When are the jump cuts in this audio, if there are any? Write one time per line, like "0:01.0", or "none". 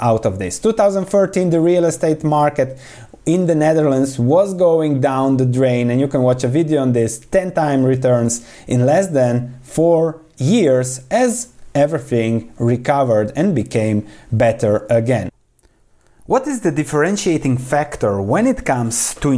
none

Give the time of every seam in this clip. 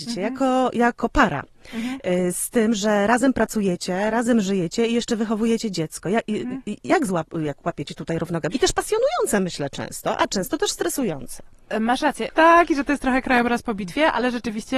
0:08.5
0:12.3

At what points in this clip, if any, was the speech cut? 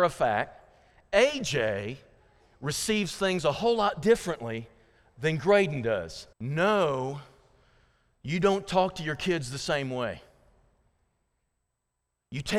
0:06.3

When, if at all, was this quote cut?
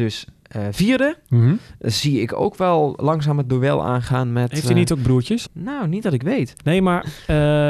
0:05.4
0:06.6

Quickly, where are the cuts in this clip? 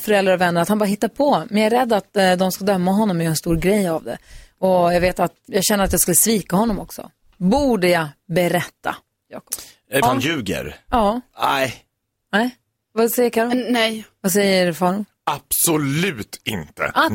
0:05.5
0:10.0

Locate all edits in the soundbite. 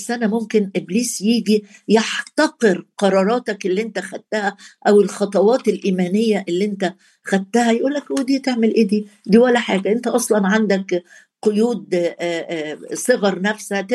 none

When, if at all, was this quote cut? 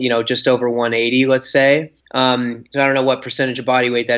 0:02.0

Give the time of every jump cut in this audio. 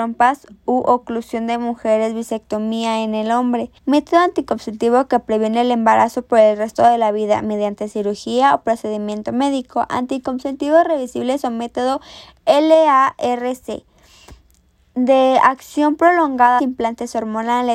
0:03.8
0:16.6

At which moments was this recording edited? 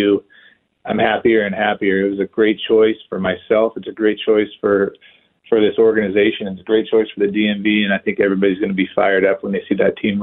none

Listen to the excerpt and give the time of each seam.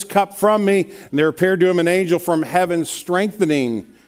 0:01.1

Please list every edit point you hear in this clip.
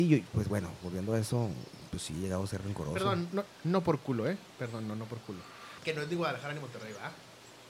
0:03.5
0:05.8

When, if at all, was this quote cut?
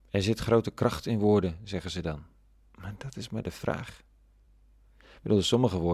none

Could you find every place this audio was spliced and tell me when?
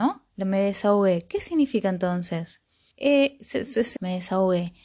0:02.9
0:04.0

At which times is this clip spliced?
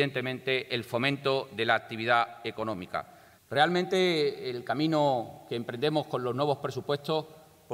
0:03.4

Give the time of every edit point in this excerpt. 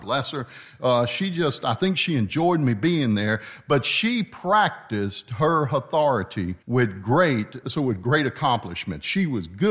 0:06.6
0:07.6

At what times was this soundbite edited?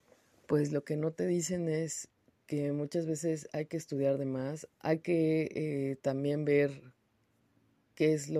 0:04.7

